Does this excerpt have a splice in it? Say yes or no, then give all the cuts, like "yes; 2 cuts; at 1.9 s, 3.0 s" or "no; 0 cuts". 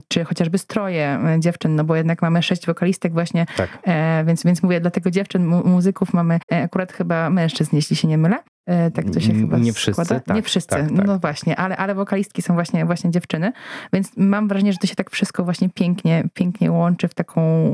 no; 0 cuts